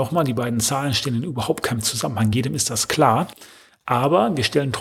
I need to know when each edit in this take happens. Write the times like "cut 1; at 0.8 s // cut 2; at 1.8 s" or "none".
none